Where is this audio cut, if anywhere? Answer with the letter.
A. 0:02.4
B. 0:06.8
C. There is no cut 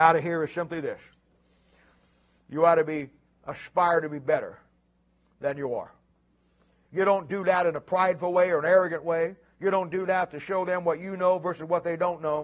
B